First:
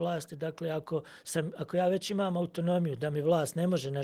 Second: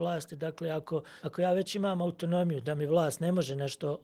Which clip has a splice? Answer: second; 1 cut; at 1.2 s

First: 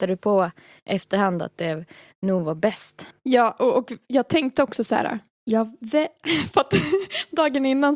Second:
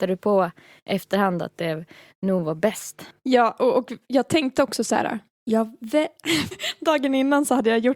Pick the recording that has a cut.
second; 1 cut; at 6.5 s

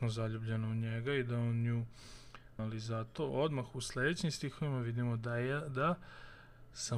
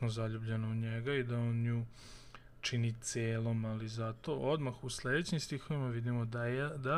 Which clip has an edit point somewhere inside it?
first; 1 cut; at 2.6 s

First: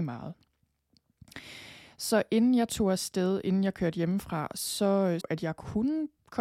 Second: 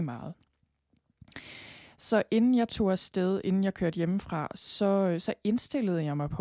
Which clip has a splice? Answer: first; 1 cut; at 5.2 s

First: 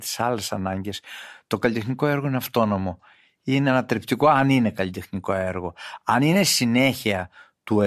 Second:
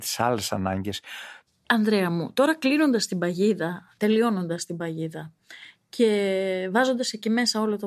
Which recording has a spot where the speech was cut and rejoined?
second; 1 cut; at 1.5 s

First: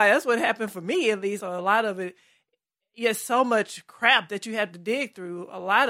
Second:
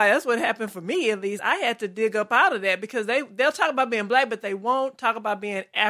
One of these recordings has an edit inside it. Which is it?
first; 1 cut; at 1.4 s

